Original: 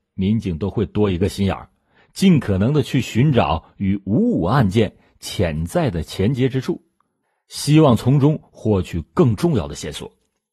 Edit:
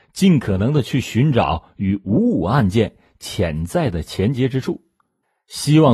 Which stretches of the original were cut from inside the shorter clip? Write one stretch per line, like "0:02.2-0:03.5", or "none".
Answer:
none